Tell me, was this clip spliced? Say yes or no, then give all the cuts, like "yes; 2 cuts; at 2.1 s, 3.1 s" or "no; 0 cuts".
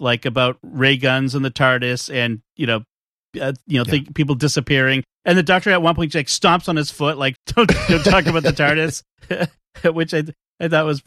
yes; 1 cut; at 7.3 s